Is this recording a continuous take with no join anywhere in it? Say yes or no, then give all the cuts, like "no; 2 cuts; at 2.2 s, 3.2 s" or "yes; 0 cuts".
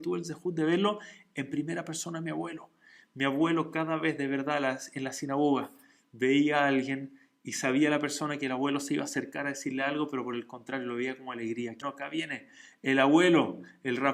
no; 1 cut; at 11.8 s